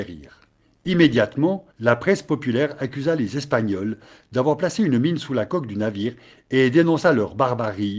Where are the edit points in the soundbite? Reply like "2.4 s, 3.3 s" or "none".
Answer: 1.7 s